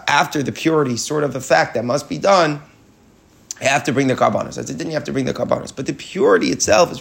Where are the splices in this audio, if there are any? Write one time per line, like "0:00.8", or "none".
none